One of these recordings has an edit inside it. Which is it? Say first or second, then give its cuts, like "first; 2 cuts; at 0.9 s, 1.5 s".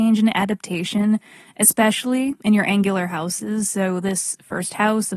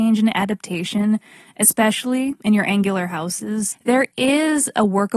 second; 1 cut; at 3.7 s